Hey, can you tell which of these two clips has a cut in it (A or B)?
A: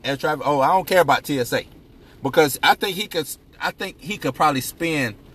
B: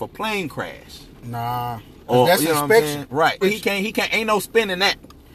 B